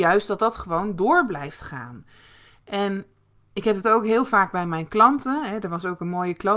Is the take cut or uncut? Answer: uncut